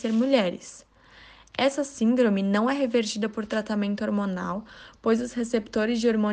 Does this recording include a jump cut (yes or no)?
no